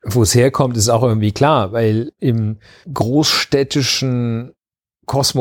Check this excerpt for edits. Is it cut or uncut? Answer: uncut